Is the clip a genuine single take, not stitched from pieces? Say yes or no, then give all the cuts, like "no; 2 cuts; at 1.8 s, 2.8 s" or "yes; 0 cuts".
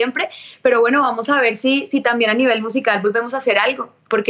yes; 0 cuts